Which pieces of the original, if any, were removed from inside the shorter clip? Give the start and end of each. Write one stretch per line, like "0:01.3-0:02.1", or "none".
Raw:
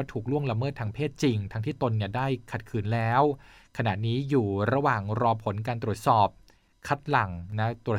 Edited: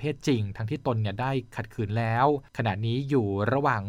0:03.4-0:03.7